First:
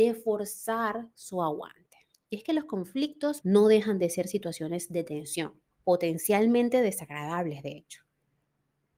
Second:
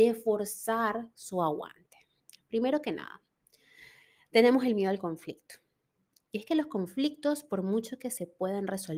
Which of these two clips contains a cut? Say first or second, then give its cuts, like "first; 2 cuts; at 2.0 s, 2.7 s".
first; 3 cuts; at 2.1 s, 3.4 s, 5.7 s